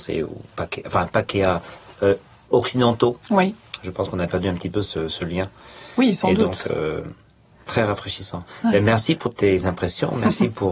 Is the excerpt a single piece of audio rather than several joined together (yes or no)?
yes